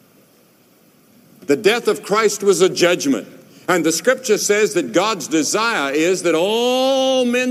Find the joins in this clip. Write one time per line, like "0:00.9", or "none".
none